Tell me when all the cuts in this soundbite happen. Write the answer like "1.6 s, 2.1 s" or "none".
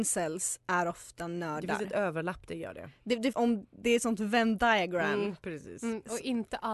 3.3 s